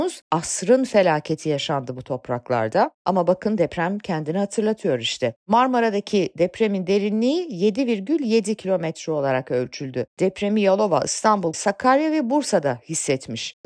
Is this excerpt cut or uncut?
cut